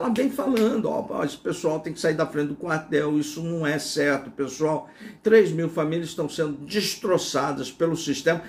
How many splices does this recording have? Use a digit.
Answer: 1